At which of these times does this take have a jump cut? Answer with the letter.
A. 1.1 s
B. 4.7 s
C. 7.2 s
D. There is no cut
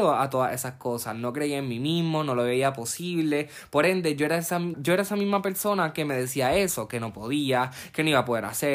B